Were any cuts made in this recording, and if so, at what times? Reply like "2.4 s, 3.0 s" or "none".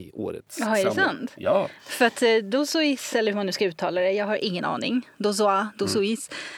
none